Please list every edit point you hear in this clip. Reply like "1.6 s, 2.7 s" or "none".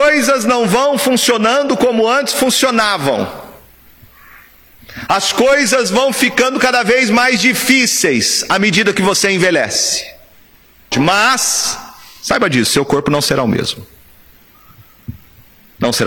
10.9 s